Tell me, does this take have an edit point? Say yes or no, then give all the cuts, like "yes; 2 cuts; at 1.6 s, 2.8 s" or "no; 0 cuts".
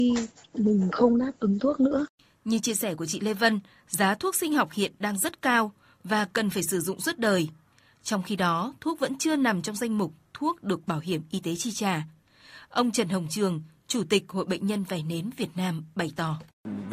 no; 0 cuts